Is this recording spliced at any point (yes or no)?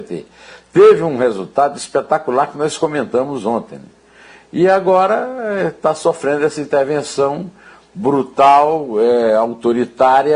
no